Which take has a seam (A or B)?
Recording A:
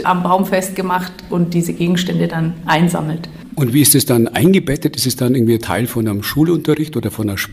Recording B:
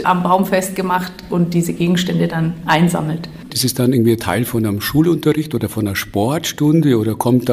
B